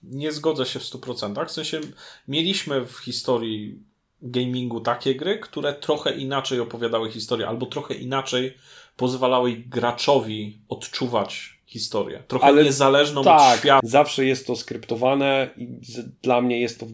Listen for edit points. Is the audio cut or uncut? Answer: cut